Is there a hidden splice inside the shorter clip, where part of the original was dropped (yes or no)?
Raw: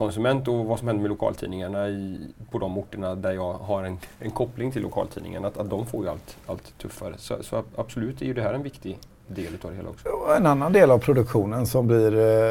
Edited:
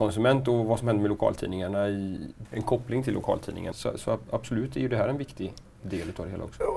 yes